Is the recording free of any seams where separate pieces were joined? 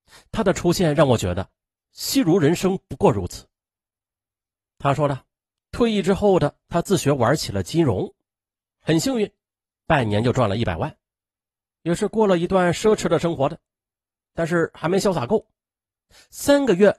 yes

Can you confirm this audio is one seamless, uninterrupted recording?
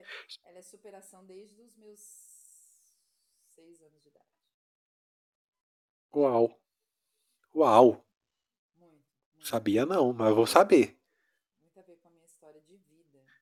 no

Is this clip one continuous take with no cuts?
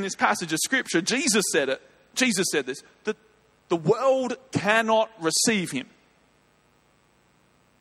yes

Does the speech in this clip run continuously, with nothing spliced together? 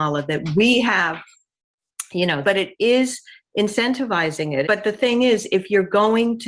no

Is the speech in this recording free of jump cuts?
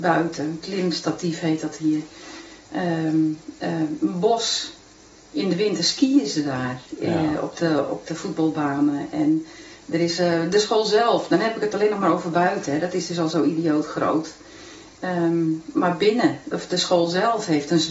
yes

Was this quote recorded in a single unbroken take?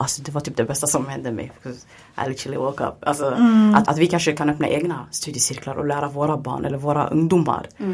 no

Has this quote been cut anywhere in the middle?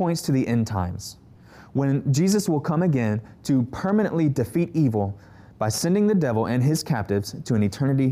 no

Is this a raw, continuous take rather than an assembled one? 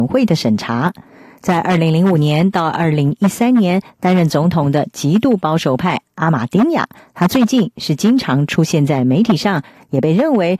yes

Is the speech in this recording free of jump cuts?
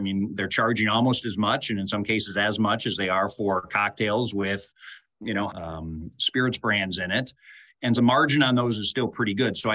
no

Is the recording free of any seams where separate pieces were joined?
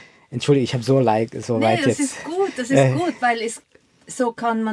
yes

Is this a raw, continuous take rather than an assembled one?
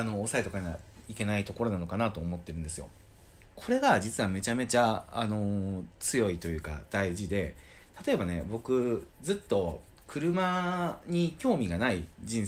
no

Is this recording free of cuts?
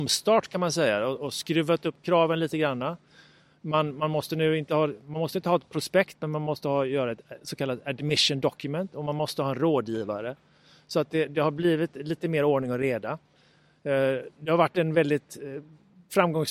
yes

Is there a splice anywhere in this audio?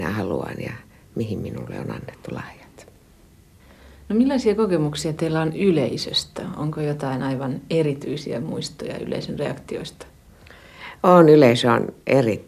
no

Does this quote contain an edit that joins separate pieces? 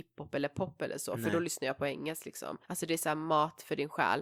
yes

